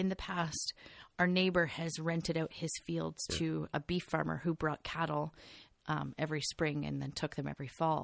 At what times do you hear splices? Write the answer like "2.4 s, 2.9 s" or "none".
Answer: none